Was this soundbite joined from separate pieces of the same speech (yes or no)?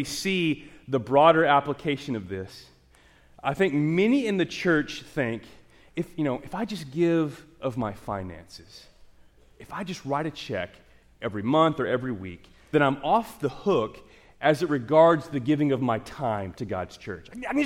yes